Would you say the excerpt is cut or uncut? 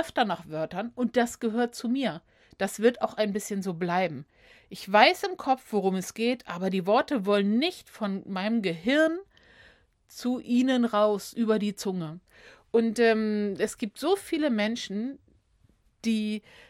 uncut